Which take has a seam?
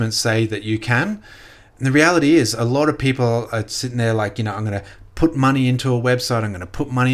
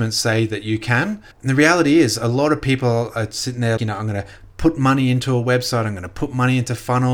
second; 2 cuts; at 1.3 s, 3.8 s

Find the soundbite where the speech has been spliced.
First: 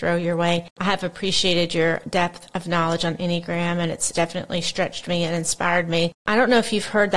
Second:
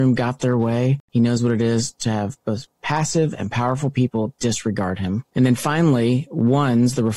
second; 1 cut; at 1.0 s

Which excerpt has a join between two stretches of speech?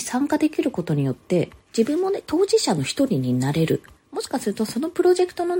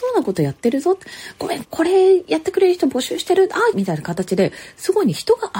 second; 2 cuts; at 1.6 s, 3.7 s

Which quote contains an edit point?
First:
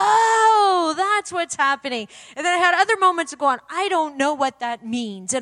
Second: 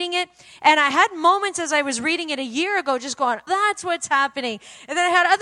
second; 1 cut; at 3.5 s

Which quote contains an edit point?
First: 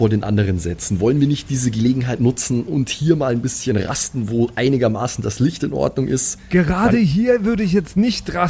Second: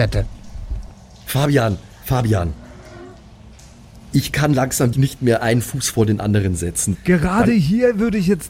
second; 2 cuts; at 4.9 s, 6.9 s

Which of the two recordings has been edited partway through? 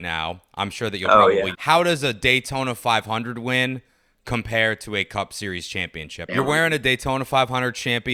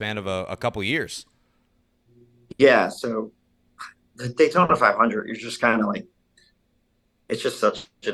first; 2 cuts; at 1.5 s, 6.3 s

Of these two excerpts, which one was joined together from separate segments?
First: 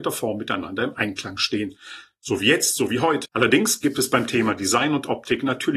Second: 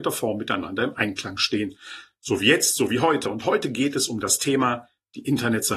first; 1 cut; at 3.2 s

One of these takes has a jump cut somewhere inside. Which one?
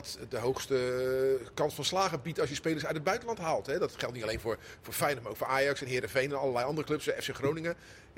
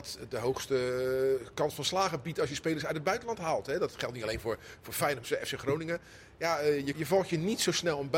second; 2 cuts; at 5.2 s, 6.9 s

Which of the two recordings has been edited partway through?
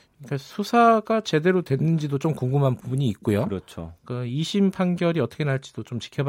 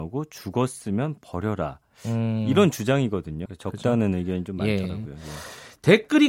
second; 1 cut; at 3.5 s

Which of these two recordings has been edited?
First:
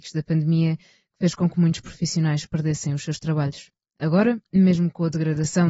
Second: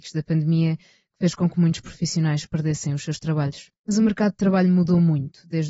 second; 1 cut; at 3.8 s

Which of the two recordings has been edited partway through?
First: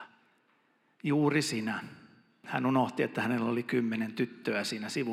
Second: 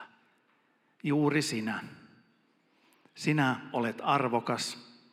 first; 1 cut; at 2.4 s

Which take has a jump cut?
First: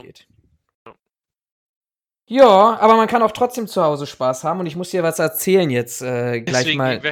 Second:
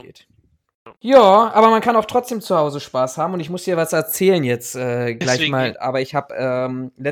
second; 2 cuts; at 1.0 s, 5.7 s

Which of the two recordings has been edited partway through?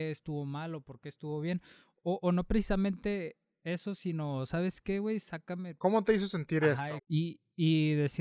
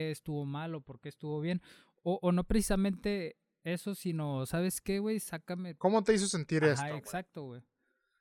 first; 1 cut; at 7.0 s

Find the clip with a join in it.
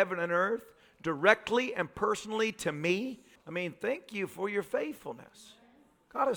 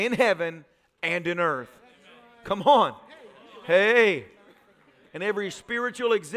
first; 1 cut; at 3.3 s

